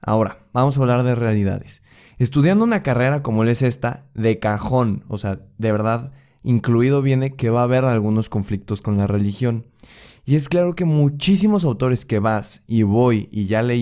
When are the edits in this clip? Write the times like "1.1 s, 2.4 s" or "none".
none